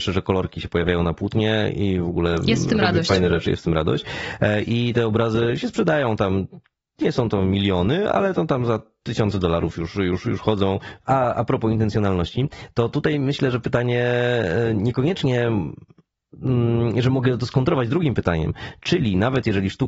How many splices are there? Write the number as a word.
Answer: two